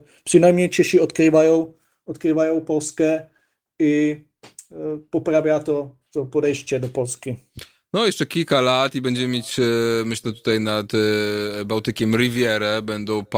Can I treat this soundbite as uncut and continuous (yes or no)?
yes